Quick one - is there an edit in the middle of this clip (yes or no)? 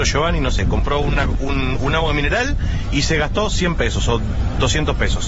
no